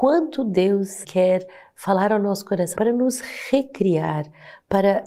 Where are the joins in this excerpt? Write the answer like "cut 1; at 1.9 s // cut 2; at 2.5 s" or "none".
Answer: cut 1; at 1.0 s // cut 2; at 2.7 s

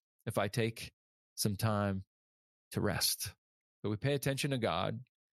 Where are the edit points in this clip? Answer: cut 1; at 3.7 s

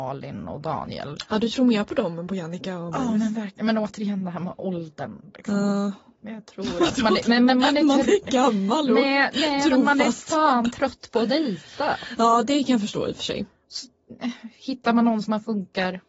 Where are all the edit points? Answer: none

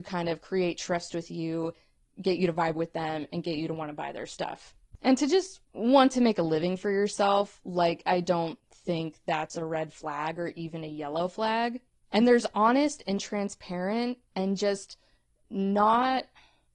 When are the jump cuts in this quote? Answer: none

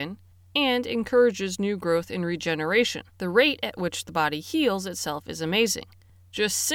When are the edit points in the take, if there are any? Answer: cut 1; at 3.1 s

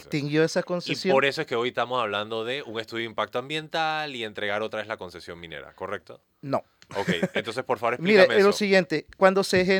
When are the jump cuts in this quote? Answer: none

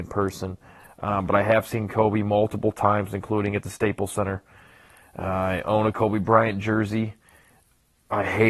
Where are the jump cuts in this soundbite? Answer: none

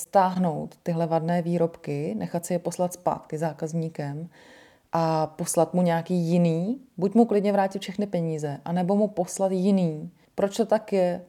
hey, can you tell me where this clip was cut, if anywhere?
cut 1; at 10.3 s

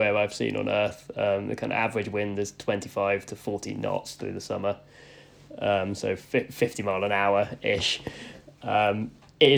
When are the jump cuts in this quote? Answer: none

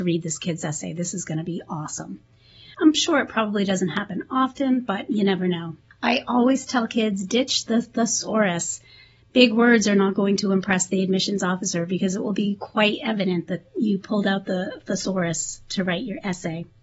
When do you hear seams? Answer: cut 1; at 2.7 s

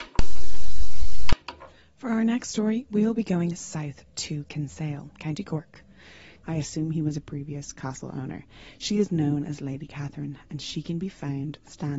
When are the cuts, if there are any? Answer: cut 1; at 6.4 s

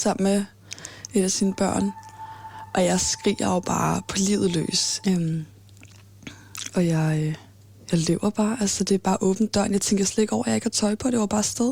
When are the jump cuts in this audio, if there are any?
cut 1; at 5.0 s

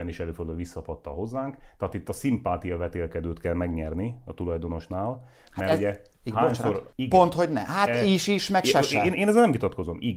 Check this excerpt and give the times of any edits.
cut 1; at 6.9 s

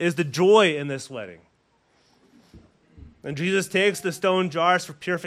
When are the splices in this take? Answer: none

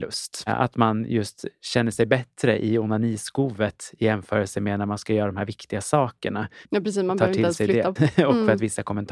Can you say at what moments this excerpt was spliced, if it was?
cut 1; at 6.7 s // cut 2; at 8.0 s

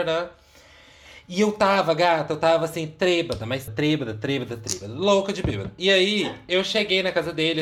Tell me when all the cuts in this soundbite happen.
cut 1; at 3.7 s

